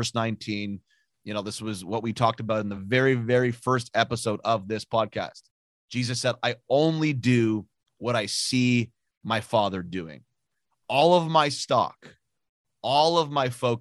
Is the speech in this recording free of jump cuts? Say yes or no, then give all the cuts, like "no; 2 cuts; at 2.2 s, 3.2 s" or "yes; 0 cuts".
yes; 0 cuts